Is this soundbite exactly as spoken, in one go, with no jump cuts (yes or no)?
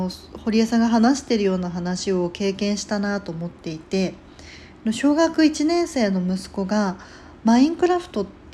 yes